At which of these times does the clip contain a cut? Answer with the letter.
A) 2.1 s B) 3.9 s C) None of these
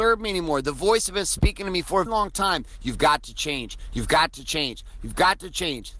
A